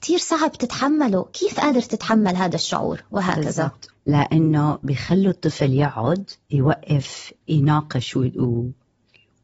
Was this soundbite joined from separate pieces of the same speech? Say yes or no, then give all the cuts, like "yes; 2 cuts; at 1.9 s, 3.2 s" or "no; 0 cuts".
yes; 1 cut; at 3.9 s